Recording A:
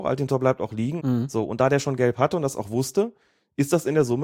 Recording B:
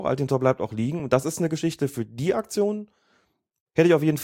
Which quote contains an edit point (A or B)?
A